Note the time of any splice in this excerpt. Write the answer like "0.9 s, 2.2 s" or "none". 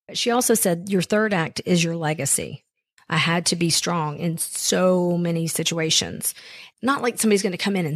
3.0 s, 6.7 s

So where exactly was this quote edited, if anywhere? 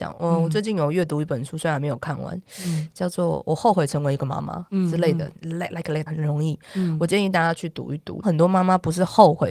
6.1 s, 8.2 s

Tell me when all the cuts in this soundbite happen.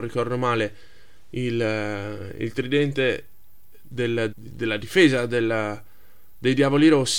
4.3 s

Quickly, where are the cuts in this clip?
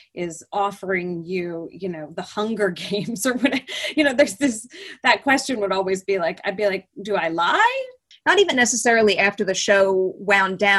8.1 s

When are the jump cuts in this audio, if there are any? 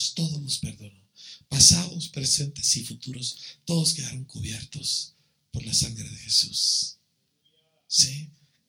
none

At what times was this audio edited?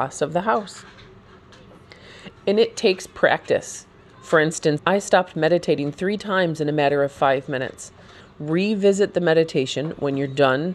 4.8 s, 8.2 s

